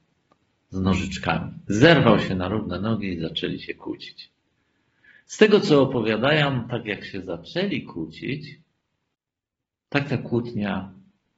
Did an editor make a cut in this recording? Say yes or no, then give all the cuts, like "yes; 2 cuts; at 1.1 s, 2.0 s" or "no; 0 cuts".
no; 0 cuts